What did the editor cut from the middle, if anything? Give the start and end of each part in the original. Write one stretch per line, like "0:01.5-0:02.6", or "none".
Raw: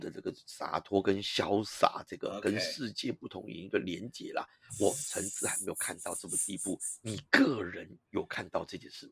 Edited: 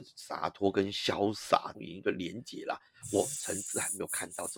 0:02.1-0:03.4